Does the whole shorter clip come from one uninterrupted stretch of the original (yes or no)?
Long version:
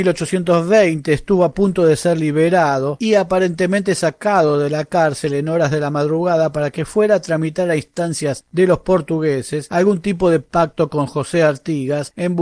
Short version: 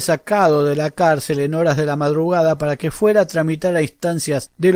yes